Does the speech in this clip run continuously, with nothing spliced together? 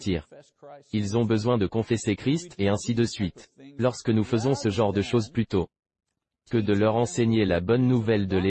yes; 0 cuts

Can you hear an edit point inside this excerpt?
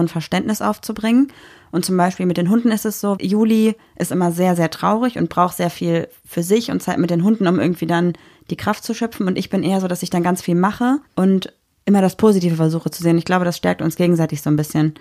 yes; 1 cut; at 3.2 s

